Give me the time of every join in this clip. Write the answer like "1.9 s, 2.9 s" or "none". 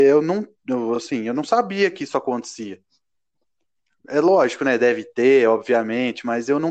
none